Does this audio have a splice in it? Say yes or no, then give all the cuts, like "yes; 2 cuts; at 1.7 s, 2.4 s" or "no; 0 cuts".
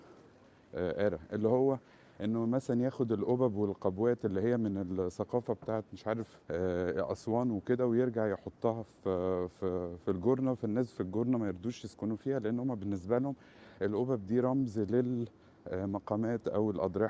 yes; 1 cut; at 6.4 s